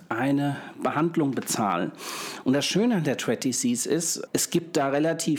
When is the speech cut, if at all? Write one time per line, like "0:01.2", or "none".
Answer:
0:02.4
0:04.3